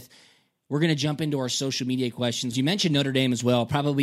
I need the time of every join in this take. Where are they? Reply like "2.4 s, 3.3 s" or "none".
2.5 s